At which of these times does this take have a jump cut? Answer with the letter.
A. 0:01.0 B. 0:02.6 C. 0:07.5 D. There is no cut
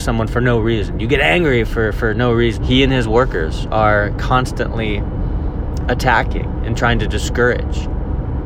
B